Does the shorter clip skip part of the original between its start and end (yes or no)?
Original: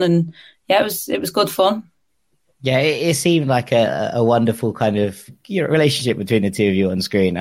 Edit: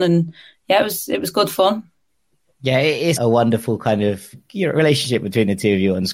yes